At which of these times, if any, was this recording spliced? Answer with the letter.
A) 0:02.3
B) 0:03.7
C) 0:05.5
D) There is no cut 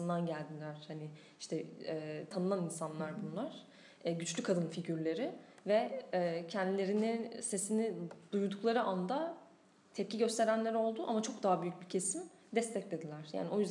A